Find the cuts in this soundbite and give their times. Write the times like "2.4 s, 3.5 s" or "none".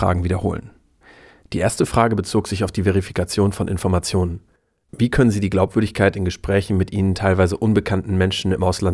none